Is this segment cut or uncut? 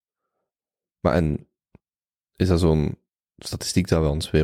uncut